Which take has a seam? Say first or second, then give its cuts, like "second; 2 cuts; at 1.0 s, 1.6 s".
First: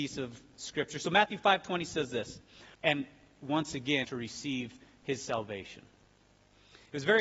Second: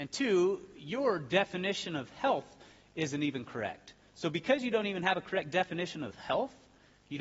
first; 2 cuts; at 2.7 s, 4.0 s